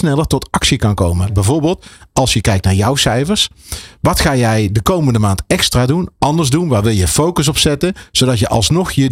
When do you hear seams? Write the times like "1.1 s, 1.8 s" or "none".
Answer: 1.3 s